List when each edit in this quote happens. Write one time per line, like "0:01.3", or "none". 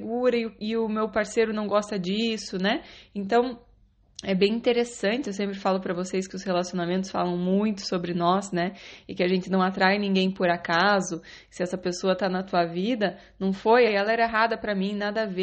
0:13.9